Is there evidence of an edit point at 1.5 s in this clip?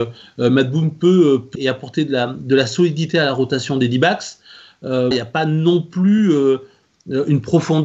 yes; 2 cuts; at 1.5 s, 5.1 s

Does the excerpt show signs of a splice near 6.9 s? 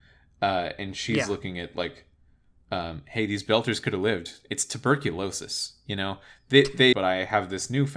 yes; 1 cut; at 6.9 s

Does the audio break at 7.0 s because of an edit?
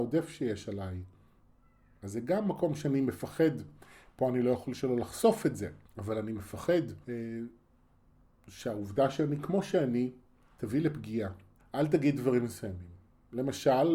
yes; 3 cuts; at 5.9 s, 7.0 s, 11.6 s

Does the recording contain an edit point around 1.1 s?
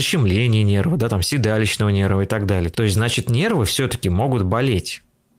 no; 1 cut; at 2.7 s

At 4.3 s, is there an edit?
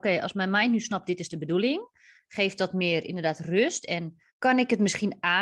yes; 1 cut; at 4.3 s

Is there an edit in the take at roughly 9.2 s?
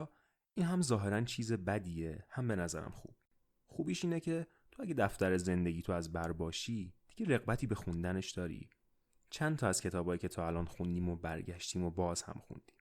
no; 0 cuts

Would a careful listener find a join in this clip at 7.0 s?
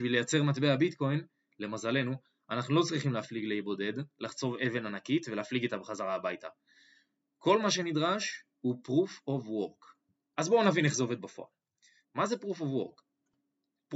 no; 2 cuts; at 10.3 s, 12.0 s

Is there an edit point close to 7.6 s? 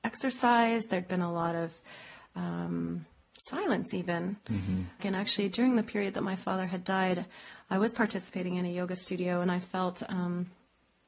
no; 1 cut; at 5.0 s

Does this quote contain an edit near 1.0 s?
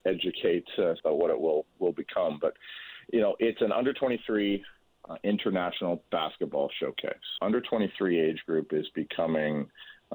yes; 2 cuts; at 1.0 s, 7.4 s

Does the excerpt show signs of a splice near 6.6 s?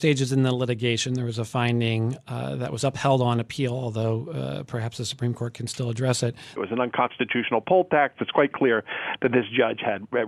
yes; 1 cut; at 6.6 s

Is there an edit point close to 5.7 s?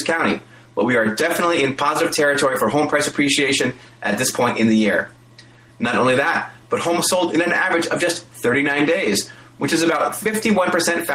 yes; 1 cut; at 5.7 s

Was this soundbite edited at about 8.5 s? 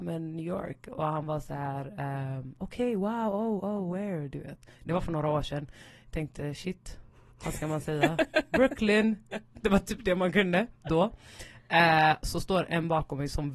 no; 1 cut; at 12.2 s

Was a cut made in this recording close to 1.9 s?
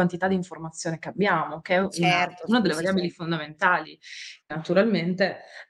no; 1 cut; at 4.4 s

